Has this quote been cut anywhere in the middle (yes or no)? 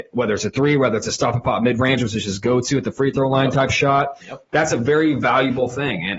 no